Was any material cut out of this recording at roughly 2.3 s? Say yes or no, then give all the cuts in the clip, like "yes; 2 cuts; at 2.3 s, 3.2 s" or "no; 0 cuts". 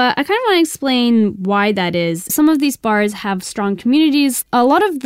yes; 1 cut; at 2.3 s